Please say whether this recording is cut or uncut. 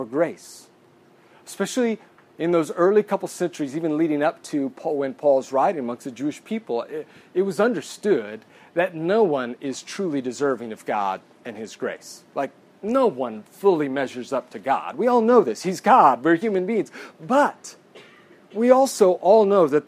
uncut